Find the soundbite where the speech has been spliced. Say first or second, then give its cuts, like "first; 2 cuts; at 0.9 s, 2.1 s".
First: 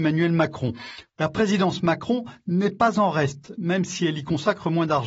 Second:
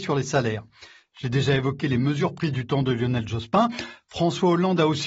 first; 1 cut; at 1.1 s